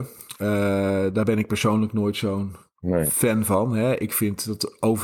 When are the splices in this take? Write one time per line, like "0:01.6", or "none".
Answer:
none